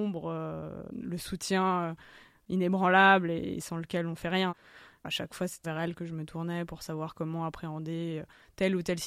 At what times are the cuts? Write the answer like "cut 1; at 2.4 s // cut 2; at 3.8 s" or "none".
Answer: cut 1; at 5.6 s